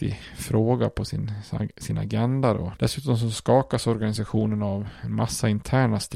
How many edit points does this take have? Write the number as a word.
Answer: one